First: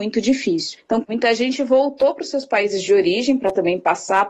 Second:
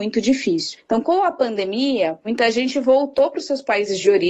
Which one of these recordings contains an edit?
first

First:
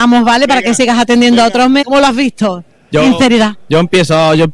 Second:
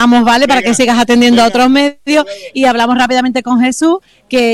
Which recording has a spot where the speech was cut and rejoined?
first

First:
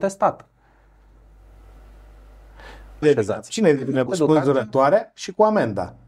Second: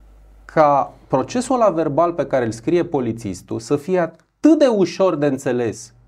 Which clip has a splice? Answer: first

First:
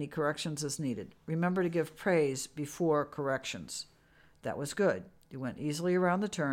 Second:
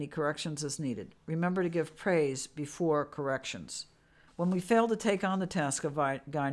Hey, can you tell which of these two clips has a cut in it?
second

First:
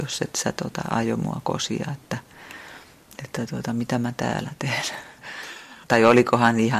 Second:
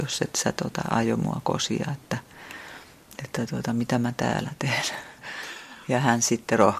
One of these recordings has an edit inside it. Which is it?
first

